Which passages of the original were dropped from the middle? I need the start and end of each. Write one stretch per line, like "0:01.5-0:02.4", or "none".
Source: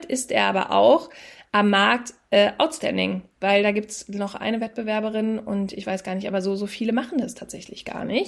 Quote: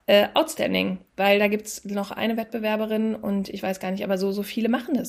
none